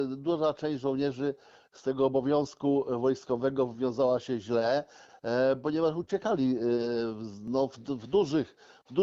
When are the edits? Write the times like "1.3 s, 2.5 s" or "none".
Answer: none